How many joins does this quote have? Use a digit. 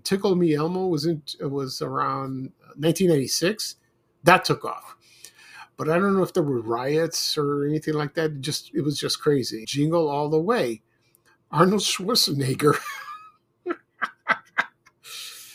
2